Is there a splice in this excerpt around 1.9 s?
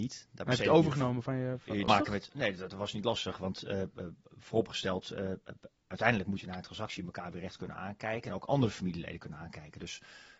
yes; 1 cut; at 1.9 s

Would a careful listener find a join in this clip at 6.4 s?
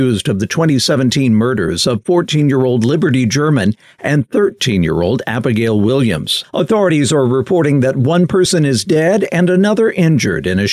yes; 1 cut; at 6.4 s

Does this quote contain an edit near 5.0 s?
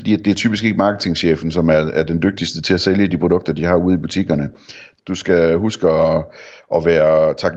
yes; 1 cut; at 5.0 s

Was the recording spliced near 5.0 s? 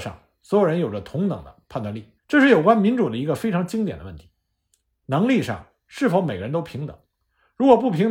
no; 1 cut; at 2.2 s

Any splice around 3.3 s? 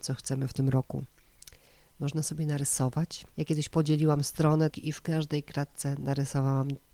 yes; 2 cuts; at 3.3 s, 4.7 s

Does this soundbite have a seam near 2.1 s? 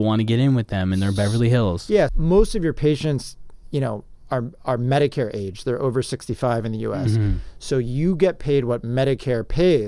yes; 1 cut; at 2.1 s

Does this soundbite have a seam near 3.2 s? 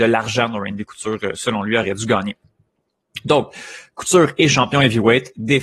no; 0 cuts

